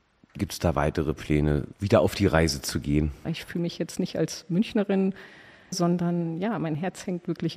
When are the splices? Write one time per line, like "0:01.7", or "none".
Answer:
0:01.7
0:03.2
0:05.7